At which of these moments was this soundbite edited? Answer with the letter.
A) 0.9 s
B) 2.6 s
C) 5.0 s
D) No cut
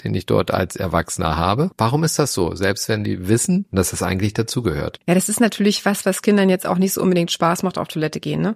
C